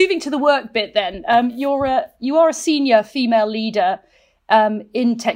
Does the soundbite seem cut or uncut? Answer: uncut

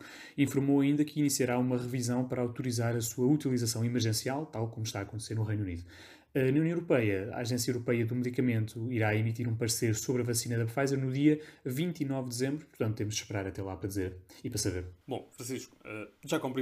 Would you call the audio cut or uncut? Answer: cut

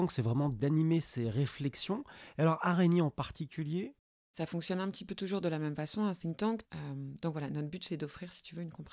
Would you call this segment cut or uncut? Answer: cut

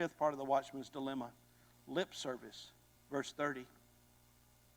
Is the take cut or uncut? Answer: cut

